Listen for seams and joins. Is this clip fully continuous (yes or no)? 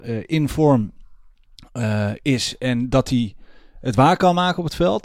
yes